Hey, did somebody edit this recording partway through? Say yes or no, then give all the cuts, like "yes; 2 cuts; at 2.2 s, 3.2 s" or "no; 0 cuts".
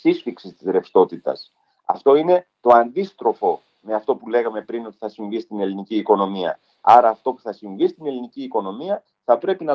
no; 0 cuts